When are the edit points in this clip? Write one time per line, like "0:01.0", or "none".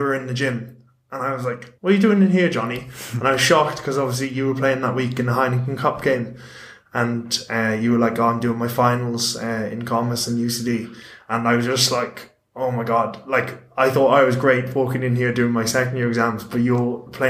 0:01.8